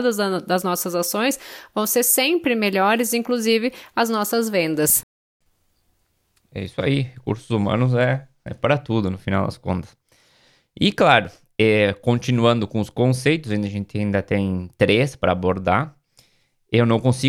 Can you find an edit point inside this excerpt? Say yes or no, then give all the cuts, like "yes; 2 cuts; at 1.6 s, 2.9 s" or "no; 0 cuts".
no; 0 cuts